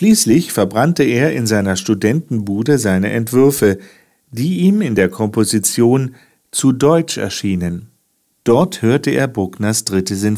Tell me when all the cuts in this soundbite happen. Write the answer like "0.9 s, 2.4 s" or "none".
8.3 s